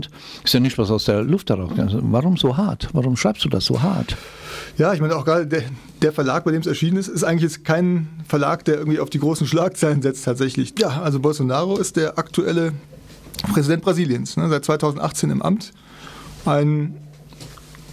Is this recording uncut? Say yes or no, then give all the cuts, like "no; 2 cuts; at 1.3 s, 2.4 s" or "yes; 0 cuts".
no; 1 cut; at 10.7 s